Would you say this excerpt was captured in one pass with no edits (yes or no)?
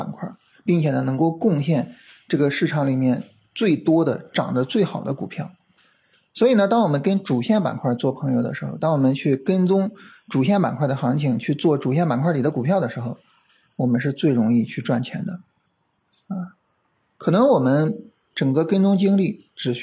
yes